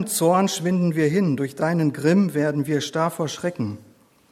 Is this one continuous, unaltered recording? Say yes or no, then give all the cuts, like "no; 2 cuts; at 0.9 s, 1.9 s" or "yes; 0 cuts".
yes; 0 cuts